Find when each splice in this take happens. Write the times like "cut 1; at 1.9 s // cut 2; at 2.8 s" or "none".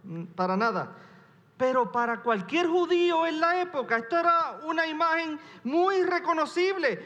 none